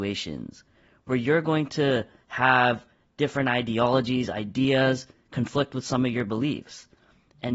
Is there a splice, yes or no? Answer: no